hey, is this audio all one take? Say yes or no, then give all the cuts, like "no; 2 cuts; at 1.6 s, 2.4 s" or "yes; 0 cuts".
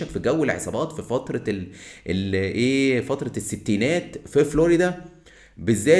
yes; 0 cuts